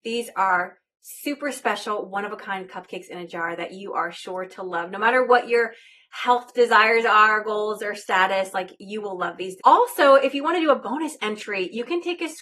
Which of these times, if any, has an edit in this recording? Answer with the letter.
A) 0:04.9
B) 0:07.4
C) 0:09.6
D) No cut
C